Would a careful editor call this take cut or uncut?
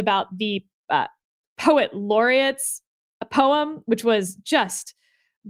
uncut